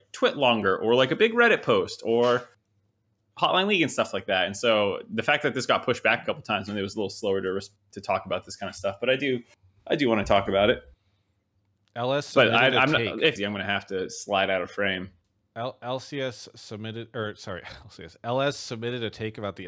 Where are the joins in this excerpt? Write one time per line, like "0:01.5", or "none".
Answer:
0:13.4